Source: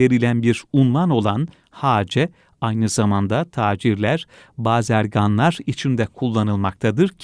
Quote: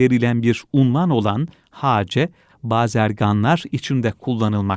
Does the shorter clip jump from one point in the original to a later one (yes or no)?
yes